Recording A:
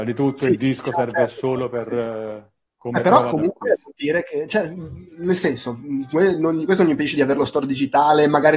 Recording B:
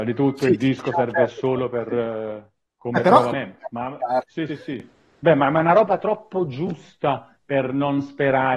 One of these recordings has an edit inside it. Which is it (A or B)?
B